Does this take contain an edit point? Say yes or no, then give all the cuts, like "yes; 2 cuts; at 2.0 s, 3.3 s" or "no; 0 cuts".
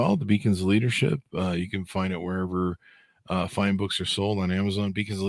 no; 0 cuts